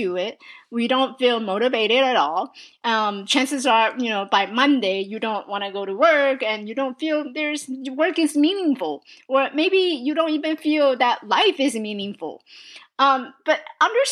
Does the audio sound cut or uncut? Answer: uncut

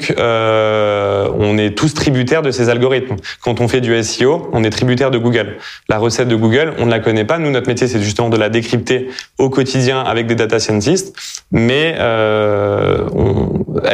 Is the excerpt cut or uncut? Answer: uncut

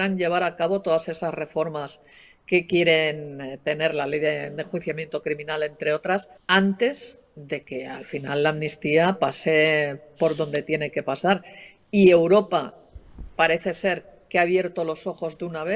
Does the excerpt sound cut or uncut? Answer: cut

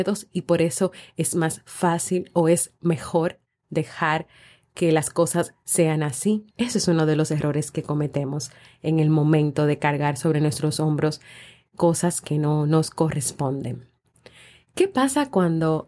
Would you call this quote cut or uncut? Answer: cut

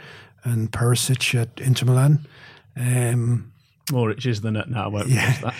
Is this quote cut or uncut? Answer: uncut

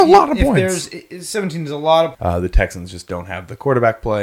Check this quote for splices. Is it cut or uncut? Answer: cut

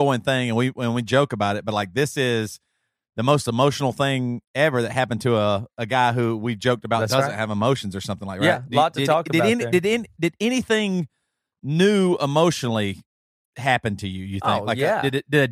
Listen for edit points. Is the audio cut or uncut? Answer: uncut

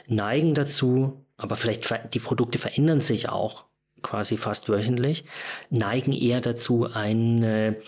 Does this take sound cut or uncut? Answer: uncut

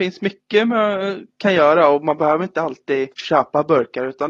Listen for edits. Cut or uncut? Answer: cut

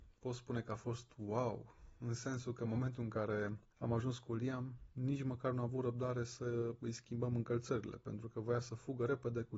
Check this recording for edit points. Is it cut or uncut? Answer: uncut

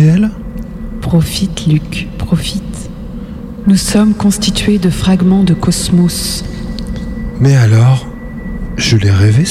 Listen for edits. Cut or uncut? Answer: cut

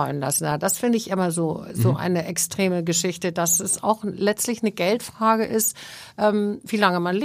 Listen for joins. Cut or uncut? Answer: uncut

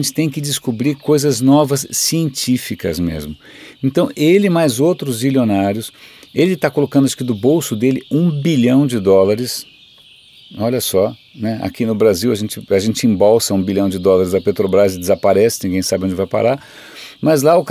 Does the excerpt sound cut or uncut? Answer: uncut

